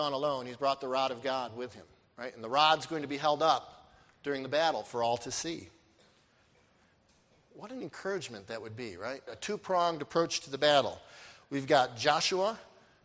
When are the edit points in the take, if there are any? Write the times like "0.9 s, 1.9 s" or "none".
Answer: 9.3 s